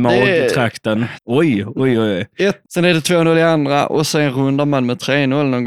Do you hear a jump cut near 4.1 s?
no; 2 cuts; at 1.1 s, 2.6 s

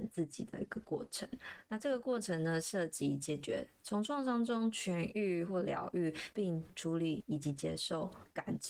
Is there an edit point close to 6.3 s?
yes; 2 cuts; at 3.8 s, 6.3 s

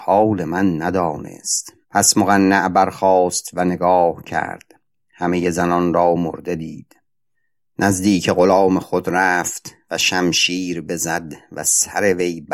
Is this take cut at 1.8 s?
yes; 1 cut; at 1.8 s

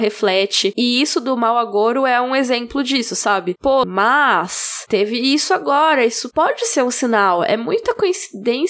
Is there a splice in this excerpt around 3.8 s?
yes; 1 cut; at 3.8 s

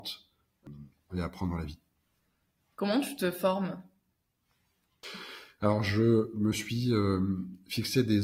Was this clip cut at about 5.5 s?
no; 1 cut; at 1.1 s

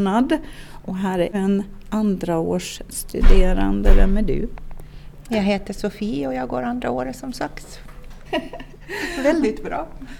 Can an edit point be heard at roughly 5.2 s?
no; 1 cut; at 8.2 s

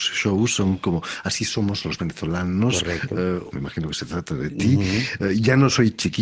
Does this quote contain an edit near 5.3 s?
no; 1 cut; at 3.5 s

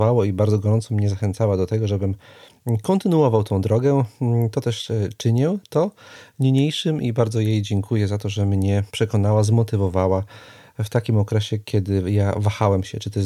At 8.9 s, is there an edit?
yes; 1 cut; at 8.9 s

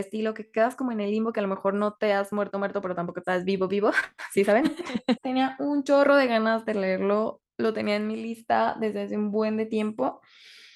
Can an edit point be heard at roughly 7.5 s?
no; 1 cut; at 5.2 s

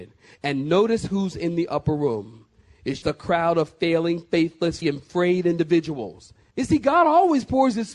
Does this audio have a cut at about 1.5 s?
no; 3 cuts; at 3.0 s, 4.8 s, 6.5 s

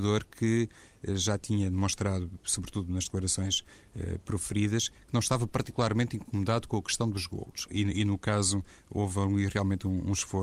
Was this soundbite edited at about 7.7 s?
yes; 1 cut; at 7.7 s

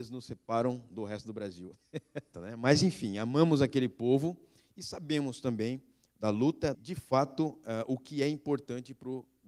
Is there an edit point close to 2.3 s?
yes; 2 cuts; at 2.3 s, 6.7 s

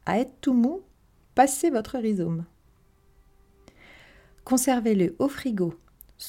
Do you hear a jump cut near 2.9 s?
no; 0 cuts

